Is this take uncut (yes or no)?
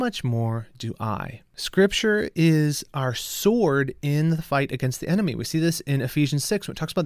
yes